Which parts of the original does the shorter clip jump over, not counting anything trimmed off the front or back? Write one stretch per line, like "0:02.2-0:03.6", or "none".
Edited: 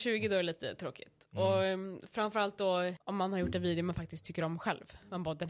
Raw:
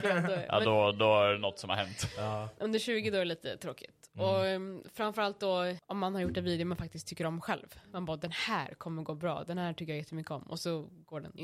none